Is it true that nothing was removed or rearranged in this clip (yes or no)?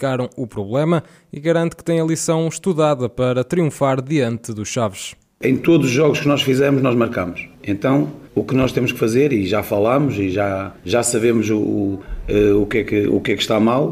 yes